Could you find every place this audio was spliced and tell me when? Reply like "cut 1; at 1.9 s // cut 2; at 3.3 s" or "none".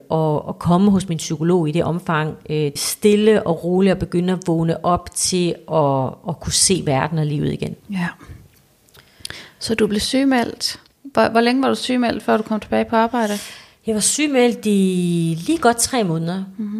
cut 1; at 2.8 s // cut 2; at 7.8 s